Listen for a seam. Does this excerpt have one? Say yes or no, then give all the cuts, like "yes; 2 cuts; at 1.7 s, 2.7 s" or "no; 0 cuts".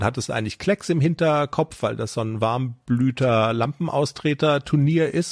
no; 0 cuts